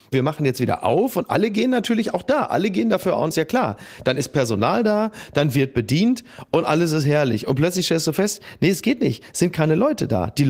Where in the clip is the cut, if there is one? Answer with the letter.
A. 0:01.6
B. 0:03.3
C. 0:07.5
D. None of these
B